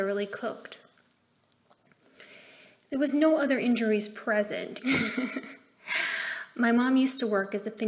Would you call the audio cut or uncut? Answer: cut